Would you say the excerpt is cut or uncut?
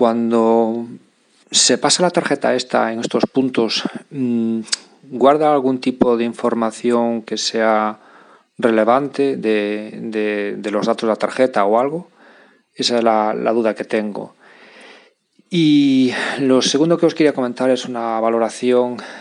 uncut